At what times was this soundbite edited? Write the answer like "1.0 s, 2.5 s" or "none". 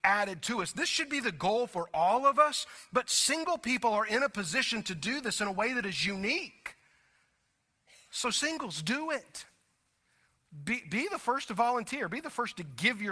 none